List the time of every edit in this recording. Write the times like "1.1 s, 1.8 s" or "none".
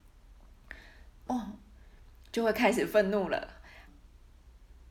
1.3 s, 3.9 s